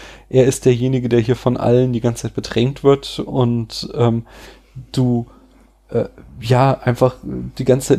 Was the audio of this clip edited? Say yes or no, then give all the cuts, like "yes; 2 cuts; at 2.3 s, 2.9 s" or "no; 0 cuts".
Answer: no; 0 cuts